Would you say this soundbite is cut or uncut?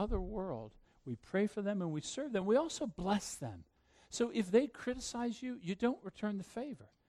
uncut